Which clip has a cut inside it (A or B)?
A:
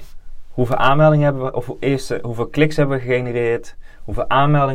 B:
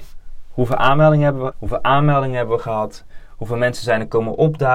B